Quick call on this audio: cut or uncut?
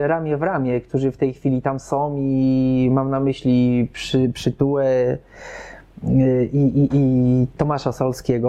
cut